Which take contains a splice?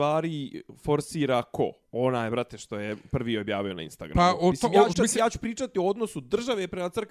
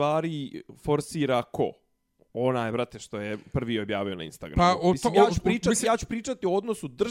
first; 2 cuts; at 1.8 s, 4.9 s

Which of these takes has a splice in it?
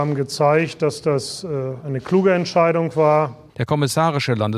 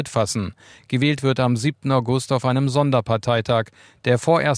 first; 1 cut; at 3.5 s

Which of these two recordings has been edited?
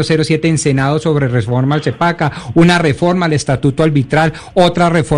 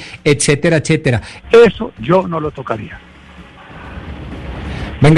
second; 1 cut; at 1.4 s

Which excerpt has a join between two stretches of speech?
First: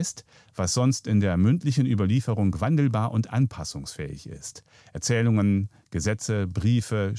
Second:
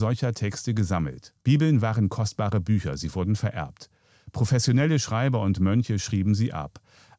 second; 1 cut; at 1.4 s

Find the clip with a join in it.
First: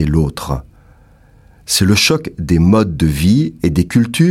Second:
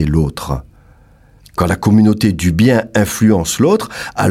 second; 1 cut; at 1.4 s

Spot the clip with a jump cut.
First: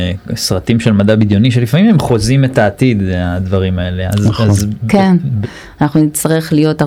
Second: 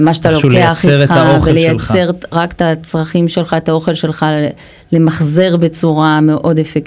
first; 1 cut; at 5.4 s

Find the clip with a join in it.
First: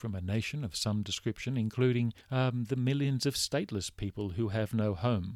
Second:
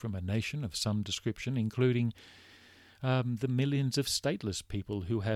first; 1 cut; at 2.2 s

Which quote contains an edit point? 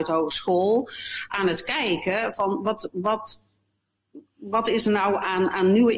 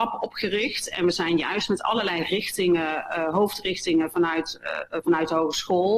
first; 1 cut; at 2.9 s

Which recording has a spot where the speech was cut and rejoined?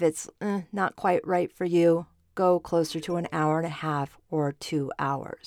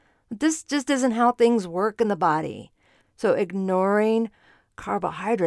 second; 1 cut; at 3.0 s

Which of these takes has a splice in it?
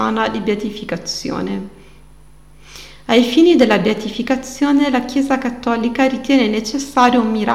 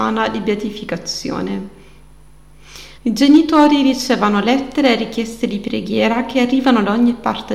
second; 1 cut; at 3.0 s

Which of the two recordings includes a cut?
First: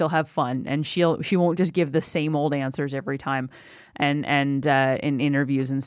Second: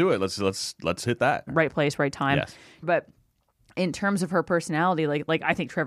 second; 2 cuts; at 1.5 s, 2.8 s

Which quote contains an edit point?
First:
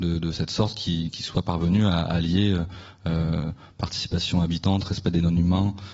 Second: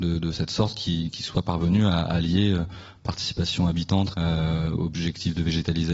second; 2 cuts; at 2.9 s, 4.1 s

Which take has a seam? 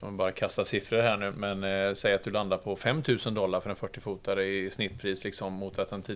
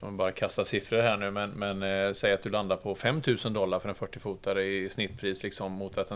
first; 1 cut; at 1.3 s

